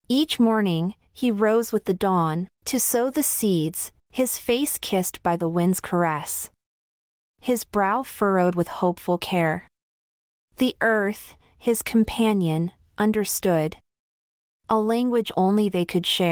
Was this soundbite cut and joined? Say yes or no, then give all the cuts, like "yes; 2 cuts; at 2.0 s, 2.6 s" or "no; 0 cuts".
yes; 2 cuts; at 2.5 s, 4.0 s